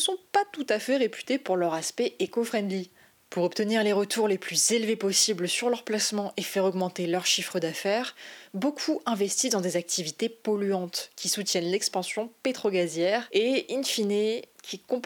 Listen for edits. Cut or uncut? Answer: uncut